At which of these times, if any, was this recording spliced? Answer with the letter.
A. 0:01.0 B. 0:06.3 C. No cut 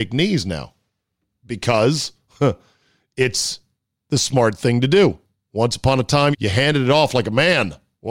B